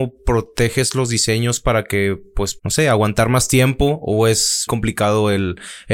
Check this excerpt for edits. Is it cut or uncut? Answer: cut